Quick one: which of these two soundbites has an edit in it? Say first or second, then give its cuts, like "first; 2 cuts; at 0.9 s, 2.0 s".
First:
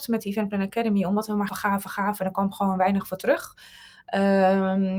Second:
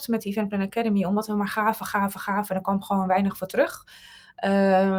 first; 1 cut; at 1.5 s